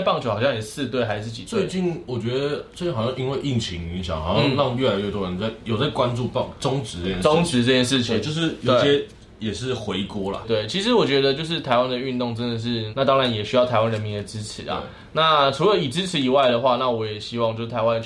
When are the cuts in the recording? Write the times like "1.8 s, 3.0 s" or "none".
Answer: 10.4 s, 12.9 s